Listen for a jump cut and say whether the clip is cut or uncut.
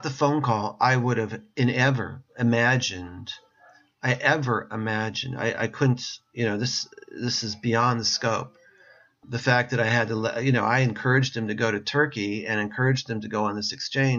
uncut